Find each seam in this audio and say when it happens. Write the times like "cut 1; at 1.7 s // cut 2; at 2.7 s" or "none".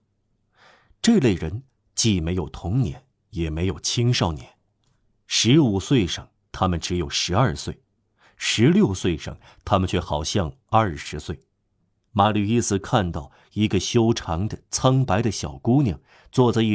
cut 1; at 12.1 s